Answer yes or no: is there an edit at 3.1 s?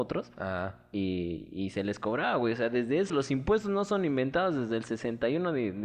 yes